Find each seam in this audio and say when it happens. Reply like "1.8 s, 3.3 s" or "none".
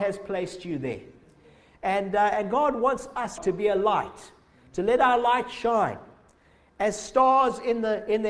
3.4 s